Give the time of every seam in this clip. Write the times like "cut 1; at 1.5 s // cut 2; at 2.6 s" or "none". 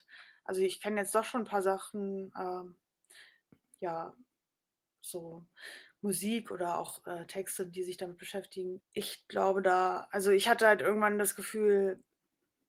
cut 1; at 8.8 s